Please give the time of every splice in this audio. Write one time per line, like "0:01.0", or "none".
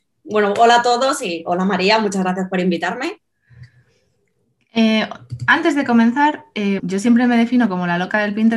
0:06.8